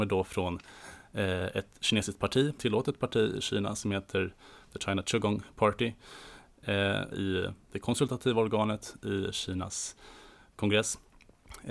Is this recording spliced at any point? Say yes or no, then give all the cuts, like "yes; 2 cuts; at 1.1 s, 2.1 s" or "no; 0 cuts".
yes; 2 cuts; at 2.6 s, 7.1 s